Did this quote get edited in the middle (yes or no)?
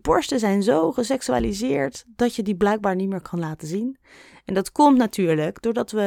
no